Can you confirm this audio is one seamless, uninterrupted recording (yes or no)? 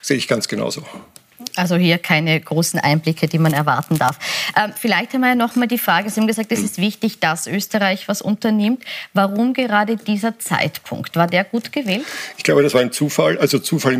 yes